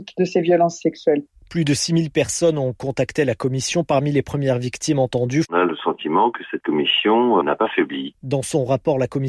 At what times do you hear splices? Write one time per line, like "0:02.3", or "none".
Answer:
0:05.5
0:07.4